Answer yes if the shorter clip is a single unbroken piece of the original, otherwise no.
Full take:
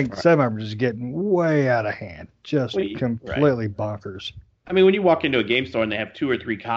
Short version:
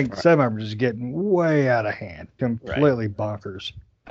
no